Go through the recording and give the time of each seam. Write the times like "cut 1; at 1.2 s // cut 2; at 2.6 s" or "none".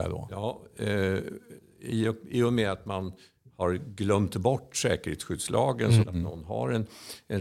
cut 1; at 6.0 s